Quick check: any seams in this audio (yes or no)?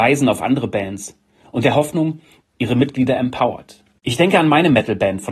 yes